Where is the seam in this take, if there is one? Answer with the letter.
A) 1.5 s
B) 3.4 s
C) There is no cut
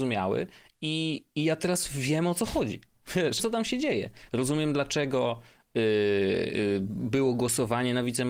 B